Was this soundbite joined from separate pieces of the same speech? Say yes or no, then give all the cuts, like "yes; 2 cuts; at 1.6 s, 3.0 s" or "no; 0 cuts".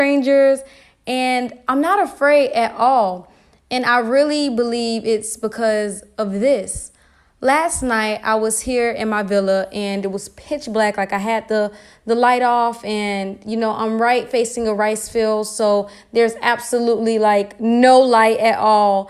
no; 0 cuts